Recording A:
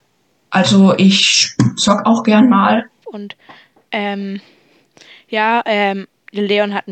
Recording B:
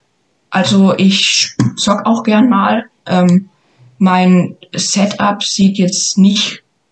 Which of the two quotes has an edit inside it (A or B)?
A